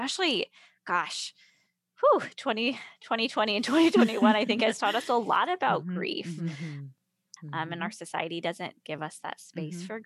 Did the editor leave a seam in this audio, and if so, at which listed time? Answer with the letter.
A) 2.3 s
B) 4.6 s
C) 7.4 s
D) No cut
C